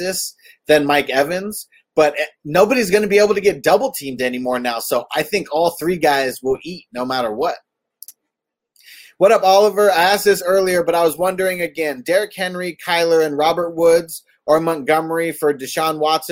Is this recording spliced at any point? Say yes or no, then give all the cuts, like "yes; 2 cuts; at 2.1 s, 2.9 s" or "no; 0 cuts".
no; 0 cuts